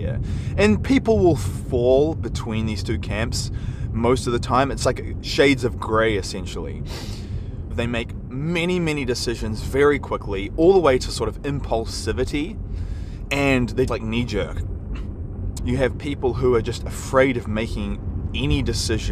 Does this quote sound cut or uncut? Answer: cut